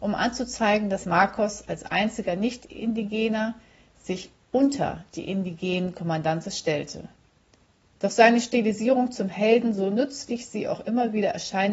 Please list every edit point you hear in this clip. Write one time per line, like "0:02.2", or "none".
none